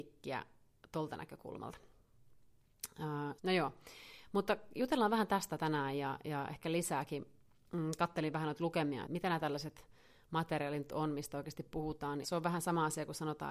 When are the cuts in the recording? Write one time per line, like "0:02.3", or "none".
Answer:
0:03.4
0:09.0
0:12.2